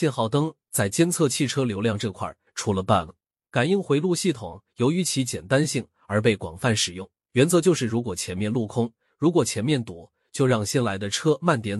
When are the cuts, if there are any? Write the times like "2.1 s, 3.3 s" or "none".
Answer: 3.4 s, 7.3 s, 9.1 s